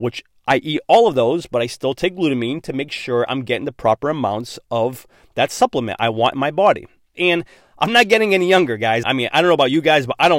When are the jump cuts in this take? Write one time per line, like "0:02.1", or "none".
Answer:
0:07.1
0:09.0